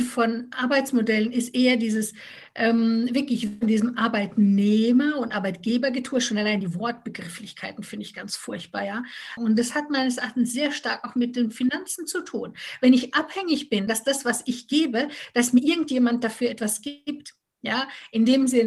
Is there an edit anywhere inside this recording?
yes; 2 cuts; at 9.4 s, 13.9 s

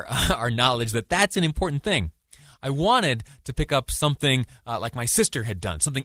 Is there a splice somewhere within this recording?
no; 0 cuts

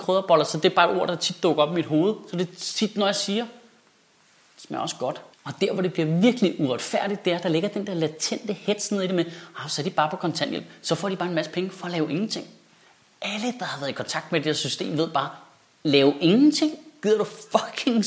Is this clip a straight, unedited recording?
yes; 0 cuts

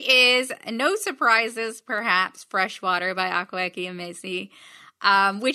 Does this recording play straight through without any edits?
yes; 0 cuts

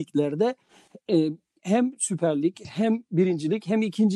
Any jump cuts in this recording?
no; 0 cuts

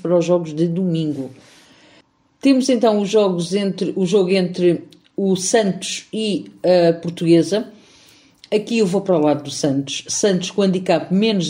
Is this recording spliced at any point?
no; 0 cuts

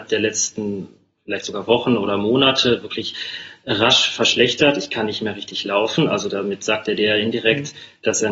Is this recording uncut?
yes; 0 cuts

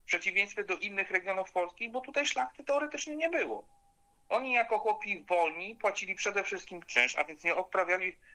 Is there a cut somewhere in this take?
no; 0 cuts

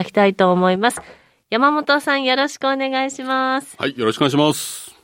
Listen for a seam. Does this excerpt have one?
no; 0 cuts

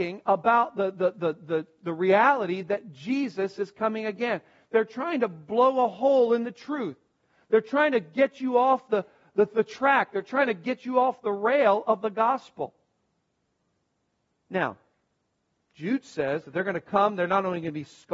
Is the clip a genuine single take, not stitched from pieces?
yes; 0 cuts

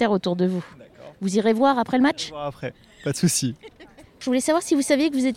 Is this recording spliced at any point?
no; 0 cuts

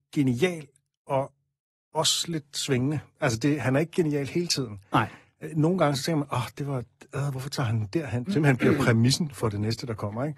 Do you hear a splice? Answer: yes; 2 cuts; at 8.3 s, 9.3 s

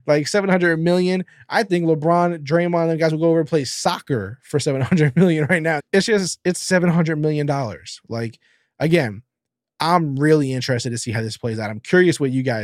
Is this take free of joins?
no; 1 cut; at 5.8 s

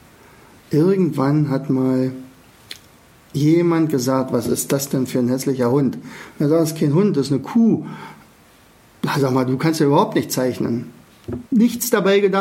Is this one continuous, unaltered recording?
no; 1 cut; at 11.5 s

